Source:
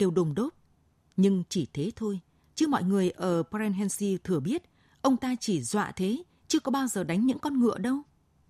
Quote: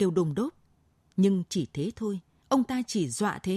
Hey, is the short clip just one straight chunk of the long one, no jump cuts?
no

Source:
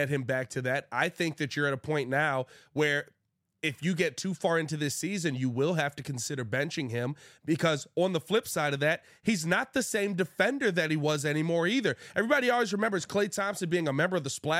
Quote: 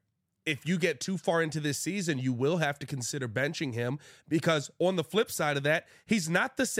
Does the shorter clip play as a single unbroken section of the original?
yes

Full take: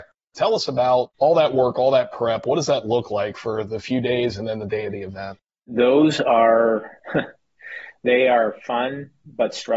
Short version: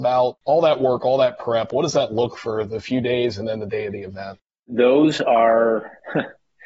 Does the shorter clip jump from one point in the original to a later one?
yes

